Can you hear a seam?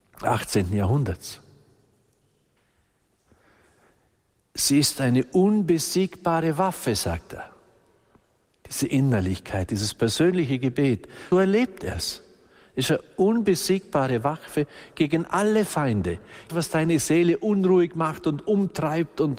yes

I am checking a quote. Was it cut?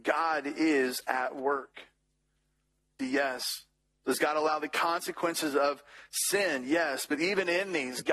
yes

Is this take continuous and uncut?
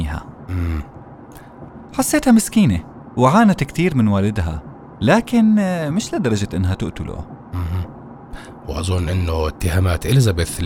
no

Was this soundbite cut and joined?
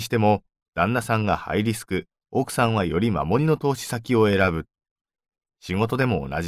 yes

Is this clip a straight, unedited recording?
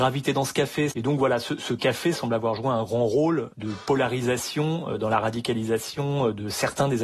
no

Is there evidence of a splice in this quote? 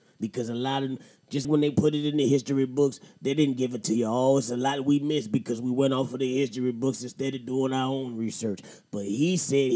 yes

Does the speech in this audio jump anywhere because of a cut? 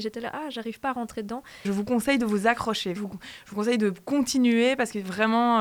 yes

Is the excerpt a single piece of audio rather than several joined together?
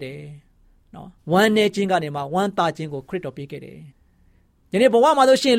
no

